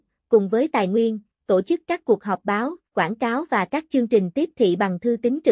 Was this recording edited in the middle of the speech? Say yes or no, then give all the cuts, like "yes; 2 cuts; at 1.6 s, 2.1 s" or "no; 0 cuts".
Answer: yes; 1 cut; at 2.9 s